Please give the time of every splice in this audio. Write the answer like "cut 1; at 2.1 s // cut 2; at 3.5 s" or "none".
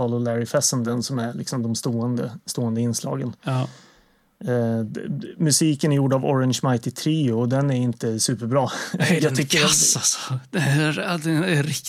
none